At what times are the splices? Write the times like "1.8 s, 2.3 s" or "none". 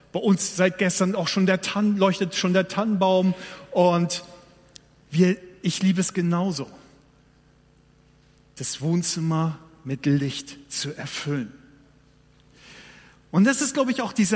none